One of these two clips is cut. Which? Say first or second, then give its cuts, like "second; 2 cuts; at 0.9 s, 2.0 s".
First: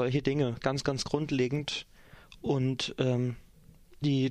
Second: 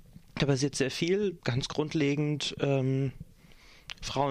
second; 1 cut; at 1.4 s